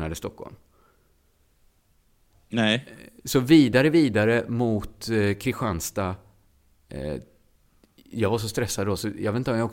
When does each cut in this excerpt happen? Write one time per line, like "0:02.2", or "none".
none